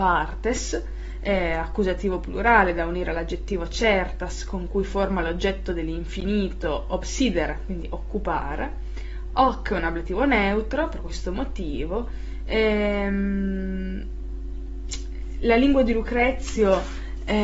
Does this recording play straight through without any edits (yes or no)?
yes